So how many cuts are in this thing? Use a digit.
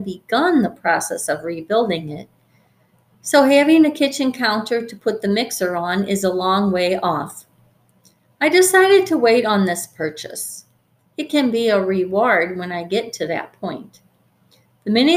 0